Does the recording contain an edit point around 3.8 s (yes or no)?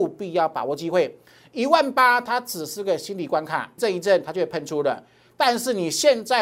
yes